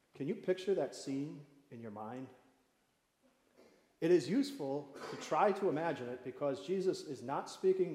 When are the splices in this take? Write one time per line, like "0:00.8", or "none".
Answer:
none